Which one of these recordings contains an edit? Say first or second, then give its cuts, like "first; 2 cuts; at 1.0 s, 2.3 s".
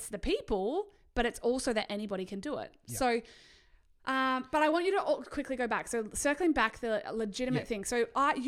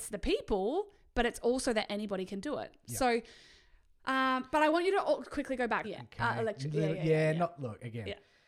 second; 1 cut; at 5.8 s